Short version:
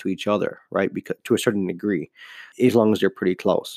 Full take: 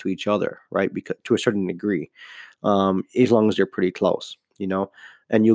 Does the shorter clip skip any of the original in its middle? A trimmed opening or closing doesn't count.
yes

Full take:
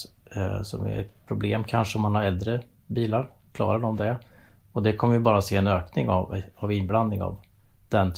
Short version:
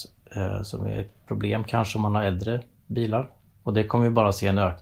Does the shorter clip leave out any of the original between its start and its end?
yes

